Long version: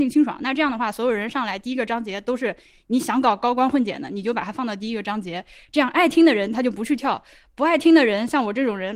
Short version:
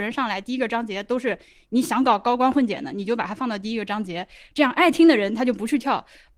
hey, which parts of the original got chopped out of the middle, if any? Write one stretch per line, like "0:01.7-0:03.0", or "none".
none